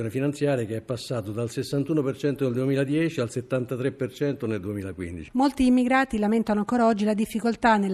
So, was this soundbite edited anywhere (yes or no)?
no